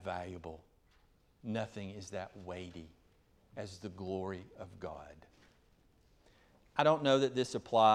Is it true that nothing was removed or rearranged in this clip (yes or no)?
yes